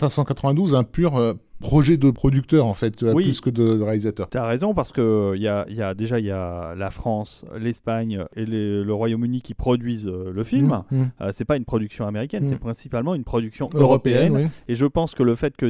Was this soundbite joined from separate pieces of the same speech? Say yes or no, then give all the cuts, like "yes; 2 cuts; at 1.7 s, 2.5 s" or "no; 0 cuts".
no; 0 cuts